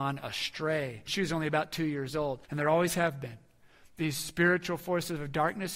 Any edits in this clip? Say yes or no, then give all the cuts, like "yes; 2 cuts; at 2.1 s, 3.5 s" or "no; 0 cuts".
yes; 2 cuts; at 1.1 s, 2.5 s